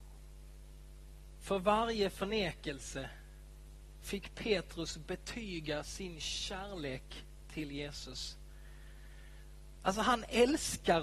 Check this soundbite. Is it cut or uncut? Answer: cut